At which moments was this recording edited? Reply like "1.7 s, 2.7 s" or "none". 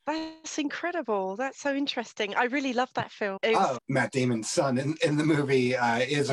3.8 s